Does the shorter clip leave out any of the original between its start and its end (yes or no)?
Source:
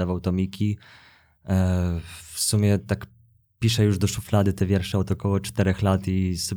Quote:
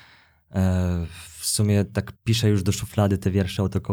yes